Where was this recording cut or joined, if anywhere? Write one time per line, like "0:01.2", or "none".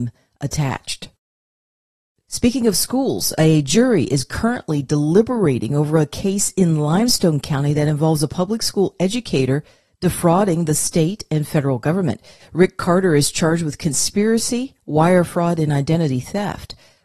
none